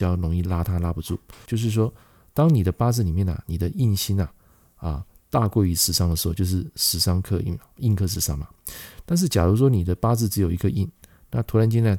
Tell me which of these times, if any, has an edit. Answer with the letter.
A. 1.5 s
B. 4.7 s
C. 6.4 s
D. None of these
A